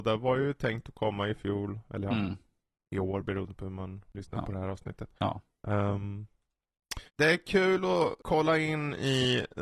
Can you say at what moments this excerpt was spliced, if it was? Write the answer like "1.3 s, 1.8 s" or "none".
7.1 s

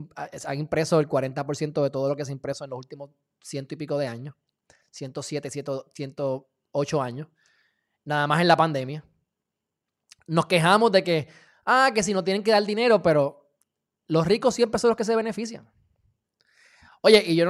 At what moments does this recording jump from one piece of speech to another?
none

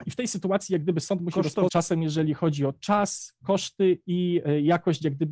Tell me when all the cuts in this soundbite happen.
1.7 s

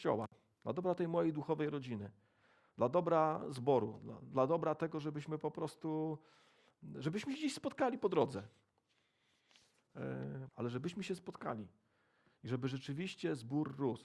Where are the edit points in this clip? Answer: 10.5 s

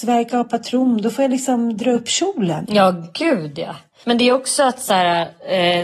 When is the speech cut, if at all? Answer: 2.6 s

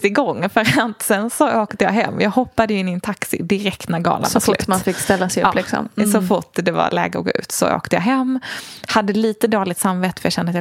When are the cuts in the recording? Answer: none

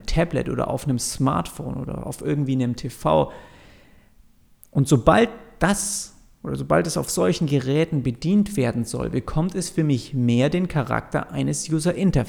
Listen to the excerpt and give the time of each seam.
none

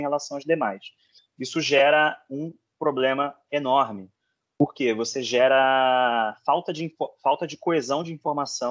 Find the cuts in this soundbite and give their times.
1.2 s

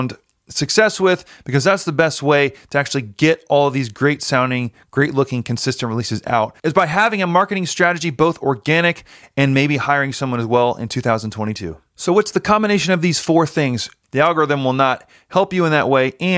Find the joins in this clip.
14.0 s

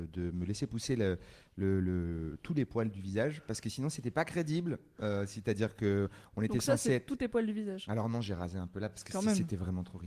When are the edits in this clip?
none

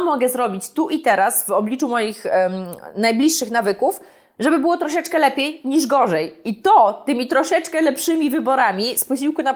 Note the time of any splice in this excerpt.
none

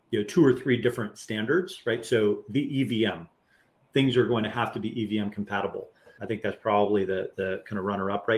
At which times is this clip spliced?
6.2 s

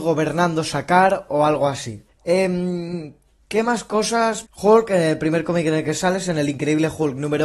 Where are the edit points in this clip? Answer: 2.1 s, 4.4 s

